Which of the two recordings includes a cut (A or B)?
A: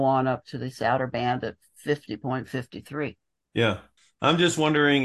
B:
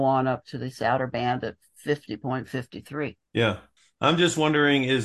B